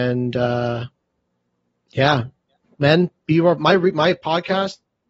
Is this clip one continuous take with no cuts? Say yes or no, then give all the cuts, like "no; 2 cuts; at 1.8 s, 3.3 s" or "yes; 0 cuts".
no; 1 cut; at 3.6 s